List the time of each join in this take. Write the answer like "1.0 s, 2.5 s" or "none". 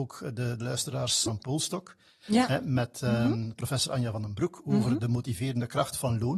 1.3 s